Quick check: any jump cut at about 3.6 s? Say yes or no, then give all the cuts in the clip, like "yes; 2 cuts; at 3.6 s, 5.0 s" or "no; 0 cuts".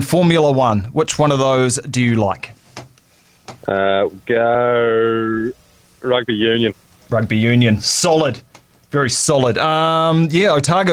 yes; 1 cut; at 3.6 s